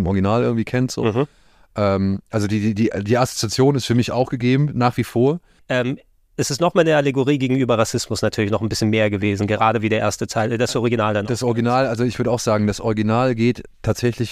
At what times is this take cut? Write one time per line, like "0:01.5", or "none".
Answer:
0:05.6